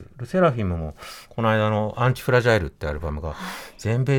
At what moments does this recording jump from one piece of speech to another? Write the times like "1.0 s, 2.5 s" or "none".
none